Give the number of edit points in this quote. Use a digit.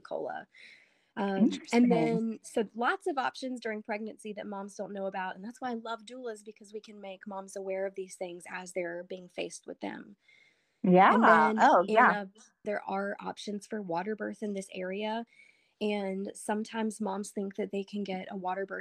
1